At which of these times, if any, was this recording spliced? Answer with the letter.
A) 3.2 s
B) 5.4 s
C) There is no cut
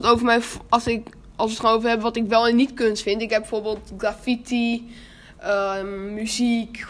C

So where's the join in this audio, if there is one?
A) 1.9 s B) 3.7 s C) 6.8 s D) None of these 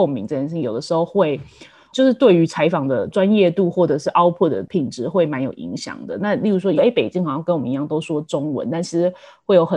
C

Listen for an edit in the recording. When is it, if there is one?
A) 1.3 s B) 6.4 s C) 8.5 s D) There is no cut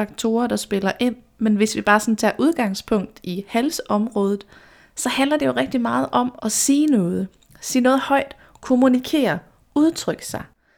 B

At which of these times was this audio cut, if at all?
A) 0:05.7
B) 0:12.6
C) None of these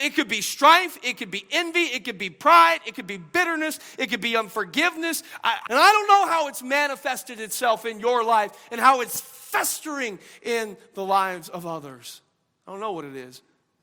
A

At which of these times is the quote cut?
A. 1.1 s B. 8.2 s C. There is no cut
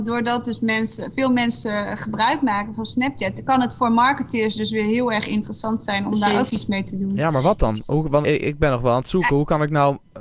B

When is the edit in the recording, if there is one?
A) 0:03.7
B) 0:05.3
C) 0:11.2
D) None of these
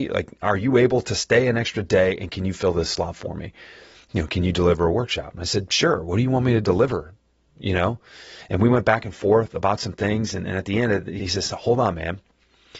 C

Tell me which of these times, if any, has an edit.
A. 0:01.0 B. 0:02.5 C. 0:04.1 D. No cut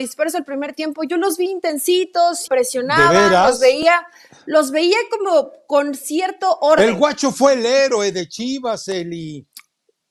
B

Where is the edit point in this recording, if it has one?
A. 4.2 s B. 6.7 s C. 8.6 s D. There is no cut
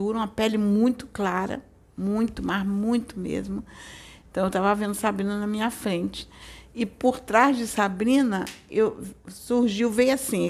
A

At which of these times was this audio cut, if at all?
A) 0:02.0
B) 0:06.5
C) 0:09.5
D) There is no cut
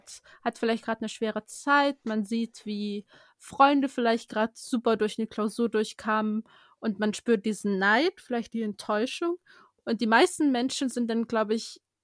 D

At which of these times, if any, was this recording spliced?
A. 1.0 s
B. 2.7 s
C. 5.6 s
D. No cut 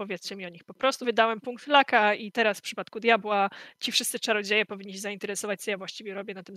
A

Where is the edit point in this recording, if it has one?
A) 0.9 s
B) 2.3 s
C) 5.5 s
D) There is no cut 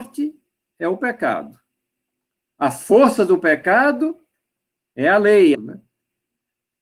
C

